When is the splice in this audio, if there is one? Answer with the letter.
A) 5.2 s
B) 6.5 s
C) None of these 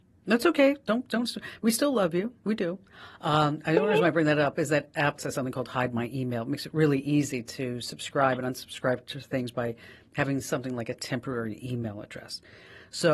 A